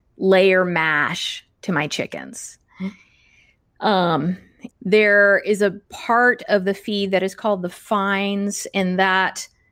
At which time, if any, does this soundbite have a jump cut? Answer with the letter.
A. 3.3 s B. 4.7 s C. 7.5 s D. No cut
B